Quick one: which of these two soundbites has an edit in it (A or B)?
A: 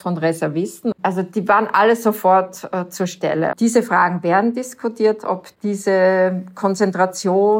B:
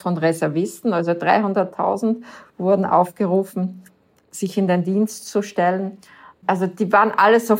A